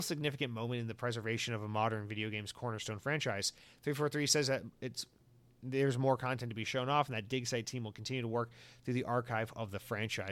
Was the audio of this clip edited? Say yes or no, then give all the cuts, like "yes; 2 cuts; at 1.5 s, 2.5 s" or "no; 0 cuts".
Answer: no; 0 cuts